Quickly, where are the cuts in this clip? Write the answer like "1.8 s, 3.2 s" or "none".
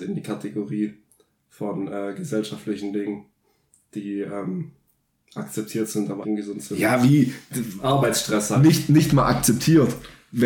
6.2 s